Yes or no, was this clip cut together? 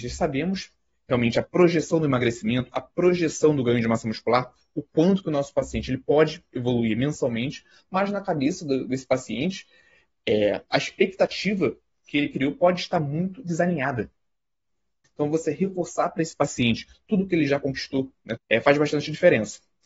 yes